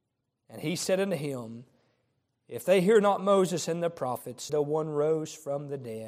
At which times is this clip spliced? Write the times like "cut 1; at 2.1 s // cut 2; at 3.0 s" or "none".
cut 1; at 4.5 s